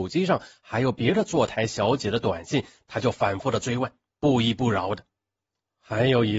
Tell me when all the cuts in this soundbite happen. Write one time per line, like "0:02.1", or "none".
none